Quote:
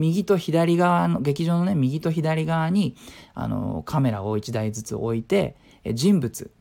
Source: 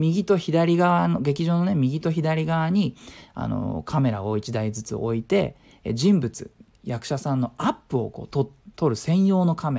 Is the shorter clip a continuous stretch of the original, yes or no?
yes